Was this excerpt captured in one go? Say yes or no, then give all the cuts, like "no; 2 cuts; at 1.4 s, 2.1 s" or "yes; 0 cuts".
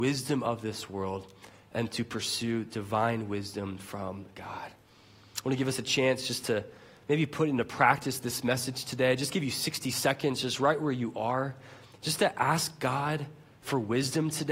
yes; 0 cuts